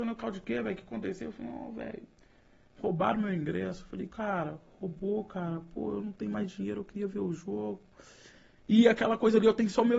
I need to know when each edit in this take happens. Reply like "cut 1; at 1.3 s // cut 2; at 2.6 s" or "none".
cut 1; at 4.1 s